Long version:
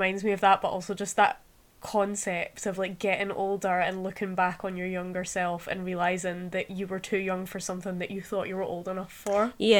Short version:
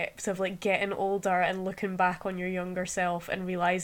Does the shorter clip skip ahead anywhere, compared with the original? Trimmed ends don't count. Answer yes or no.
no